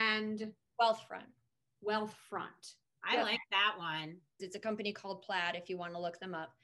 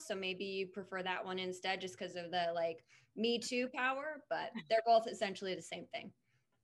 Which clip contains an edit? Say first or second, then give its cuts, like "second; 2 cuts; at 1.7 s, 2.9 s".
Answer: first; 1 cut; at 4.4 s